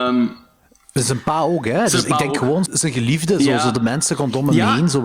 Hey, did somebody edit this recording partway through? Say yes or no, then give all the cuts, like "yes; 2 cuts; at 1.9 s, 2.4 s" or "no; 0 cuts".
yes; 1 cut; at 2.7 s